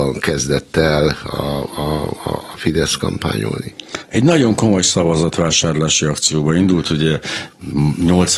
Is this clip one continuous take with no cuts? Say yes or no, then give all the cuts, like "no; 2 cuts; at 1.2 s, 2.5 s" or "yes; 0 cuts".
yes; 0 cuts